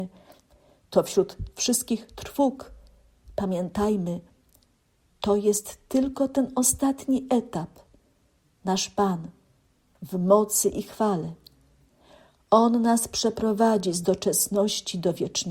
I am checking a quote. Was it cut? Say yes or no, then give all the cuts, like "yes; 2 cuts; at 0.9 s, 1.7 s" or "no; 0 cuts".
yes; 1 cut; at 8.6 s